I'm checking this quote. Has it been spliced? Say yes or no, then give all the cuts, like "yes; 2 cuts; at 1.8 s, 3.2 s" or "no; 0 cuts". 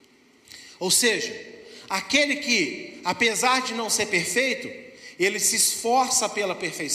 no; 0 cuts